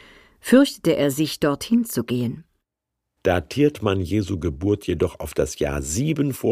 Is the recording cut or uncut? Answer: cut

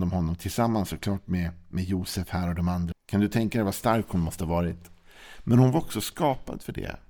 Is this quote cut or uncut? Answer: cut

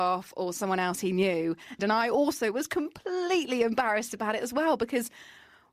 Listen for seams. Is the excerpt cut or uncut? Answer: cut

